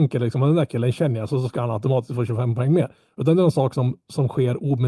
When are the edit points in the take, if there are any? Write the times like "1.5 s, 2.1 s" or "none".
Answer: none

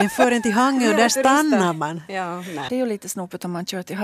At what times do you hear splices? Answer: 2.7 s

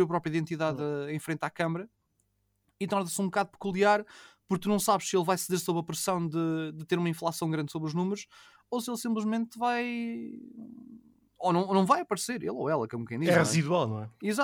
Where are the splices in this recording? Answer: none

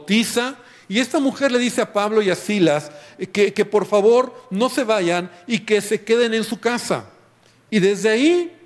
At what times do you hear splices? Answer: 7.7 s

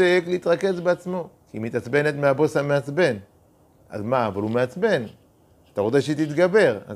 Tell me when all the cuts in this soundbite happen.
1.4 s

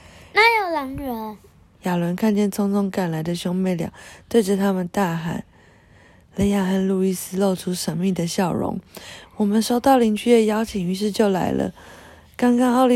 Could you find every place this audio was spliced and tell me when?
1.8 s

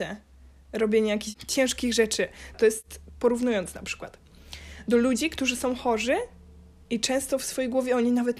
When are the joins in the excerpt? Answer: 2.5 s

